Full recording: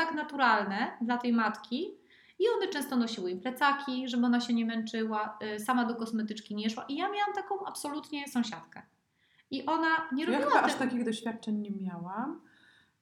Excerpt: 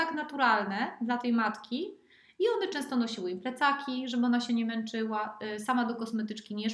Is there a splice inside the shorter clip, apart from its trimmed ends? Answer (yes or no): no